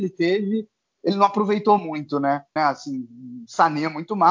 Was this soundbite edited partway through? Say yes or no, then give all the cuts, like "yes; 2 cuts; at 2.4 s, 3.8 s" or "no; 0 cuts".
yes; 1 cut; at 2.6 s